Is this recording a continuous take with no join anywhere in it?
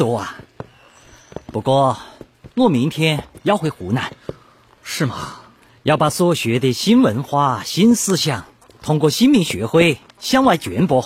yes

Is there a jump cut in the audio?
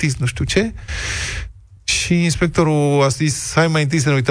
no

